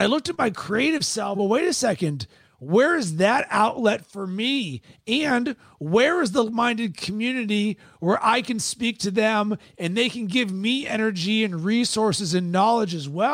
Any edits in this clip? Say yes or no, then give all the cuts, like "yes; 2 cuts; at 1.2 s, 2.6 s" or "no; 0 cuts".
yes; 2 cuts; at 1.3 s, 6.5 s